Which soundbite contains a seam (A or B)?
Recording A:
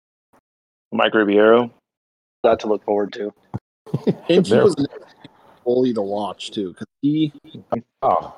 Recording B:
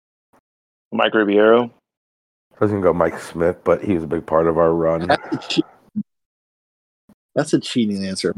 A